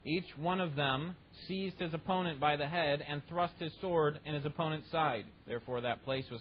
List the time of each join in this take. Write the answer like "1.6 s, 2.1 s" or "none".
5.4 s